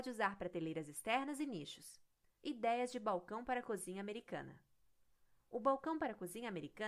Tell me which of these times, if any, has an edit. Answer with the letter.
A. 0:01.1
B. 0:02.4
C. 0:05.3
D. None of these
B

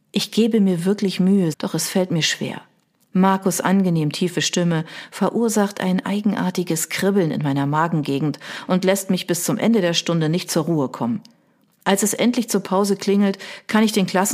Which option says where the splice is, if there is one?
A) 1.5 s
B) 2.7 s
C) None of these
A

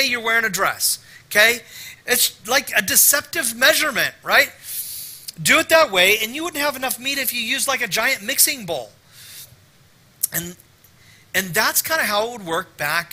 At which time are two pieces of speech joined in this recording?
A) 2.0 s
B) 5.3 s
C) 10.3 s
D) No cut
A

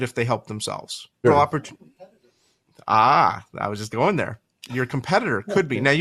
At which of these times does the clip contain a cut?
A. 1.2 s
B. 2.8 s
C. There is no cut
A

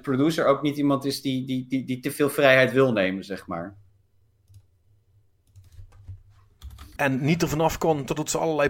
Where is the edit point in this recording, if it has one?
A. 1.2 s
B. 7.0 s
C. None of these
B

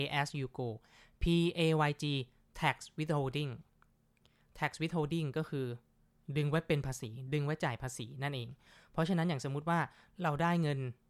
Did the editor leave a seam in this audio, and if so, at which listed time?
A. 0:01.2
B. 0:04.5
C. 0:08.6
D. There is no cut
D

